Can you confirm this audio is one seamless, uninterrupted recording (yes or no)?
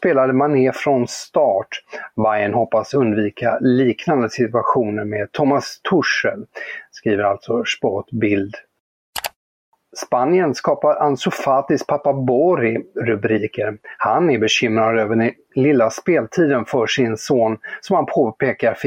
no